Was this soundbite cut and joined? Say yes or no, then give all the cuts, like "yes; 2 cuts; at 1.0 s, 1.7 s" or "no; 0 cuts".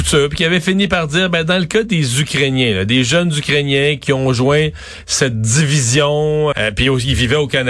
yes; 1 cut; at 6.5 s